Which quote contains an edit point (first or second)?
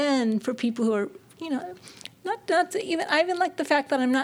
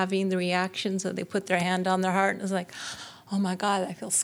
first